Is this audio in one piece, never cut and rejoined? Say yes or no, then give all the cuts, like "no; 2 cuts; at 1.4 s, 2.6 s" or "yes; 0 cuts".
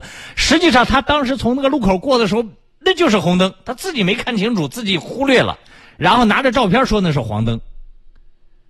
yes; 0 cuts